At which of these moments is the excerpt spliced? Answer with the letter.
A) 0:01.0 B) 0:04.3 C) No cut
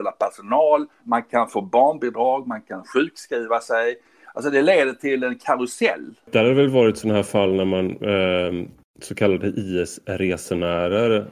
A